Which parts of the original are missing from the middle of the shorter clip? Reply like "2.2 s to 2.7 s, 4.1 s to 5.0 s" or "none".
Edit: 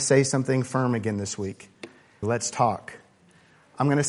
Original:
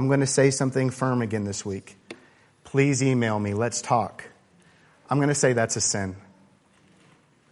2.5 s to 3.5 s